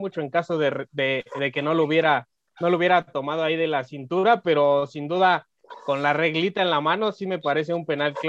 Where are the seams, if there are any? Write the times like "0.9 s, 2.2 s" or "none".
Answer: none